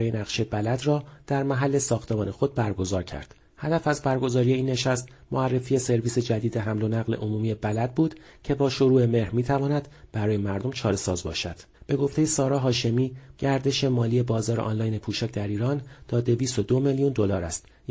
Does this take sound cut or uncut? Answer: cut